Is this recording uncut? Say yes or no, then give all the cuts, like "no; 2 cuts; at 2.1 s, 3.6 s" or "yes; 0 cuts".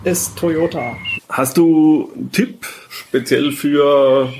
no; 2 cuts; at 1.2 s, 2.8 s